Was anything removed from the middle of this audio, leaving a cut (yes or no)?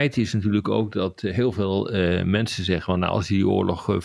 no